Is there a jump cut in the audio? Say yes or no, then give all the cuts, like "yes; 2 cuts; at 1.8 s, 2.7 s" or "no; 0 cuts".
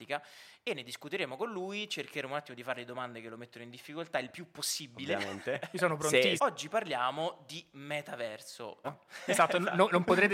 yes; 2 cuts; at 6.4 s, 8.8 s